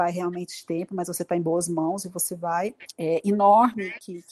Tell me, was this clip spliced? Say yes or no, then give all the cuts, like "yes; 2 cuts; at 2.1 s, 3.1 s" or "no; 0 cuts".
yes; 1 cut; at 2.9 s